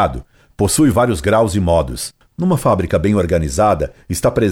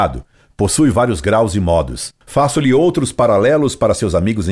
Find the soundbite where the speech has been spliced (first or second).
first